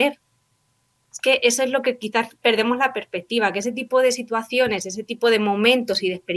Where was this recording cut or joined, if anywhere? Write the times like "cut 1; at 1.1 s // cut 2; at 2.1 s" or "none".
none